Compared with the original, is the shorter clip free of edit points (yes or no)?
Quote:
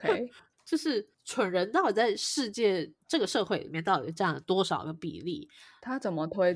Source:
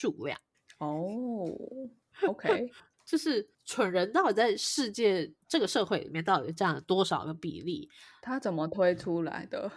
yes